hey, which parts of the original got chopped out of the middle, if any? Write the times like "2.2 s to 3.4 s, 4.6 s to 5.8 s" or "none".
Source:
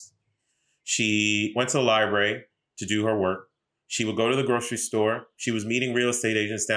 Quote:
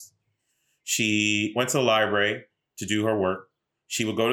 none